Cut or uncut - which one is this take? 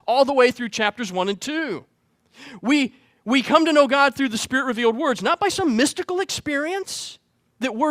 uncut